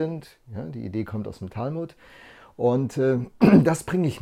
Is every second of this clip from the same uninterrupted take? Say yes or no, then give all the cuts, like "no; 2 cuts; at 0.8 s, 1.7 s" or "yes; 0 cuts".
yes; 0 cuts